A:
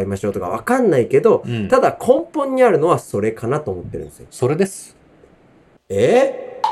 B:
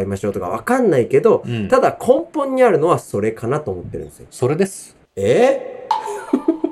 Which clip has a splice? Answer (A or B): B